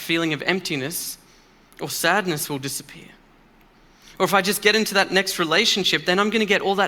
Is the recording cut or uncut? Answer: uncut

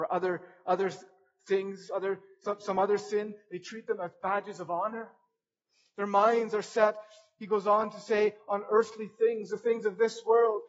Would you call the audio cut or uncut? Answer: uncut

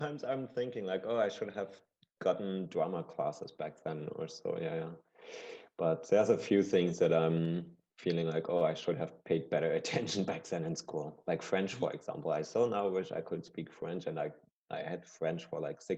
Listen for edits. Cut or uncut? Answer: uncut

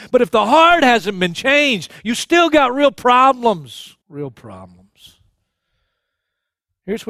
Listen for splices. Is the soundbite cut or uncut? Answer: cut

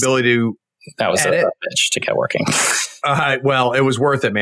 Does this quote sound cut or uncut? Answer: uncut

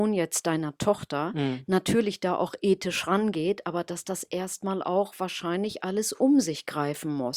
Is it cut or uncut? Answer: uncut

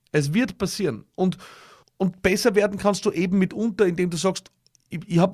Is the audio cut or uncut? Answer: cut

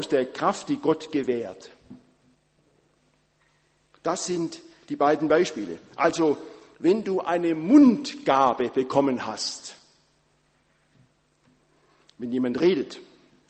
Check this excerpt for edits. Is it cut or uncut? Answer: uncut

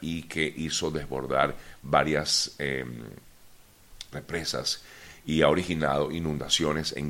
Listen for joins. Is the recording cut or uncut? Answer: cut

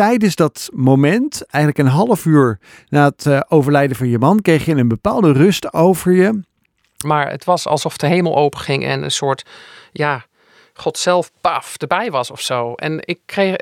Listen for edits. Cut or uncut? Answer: cut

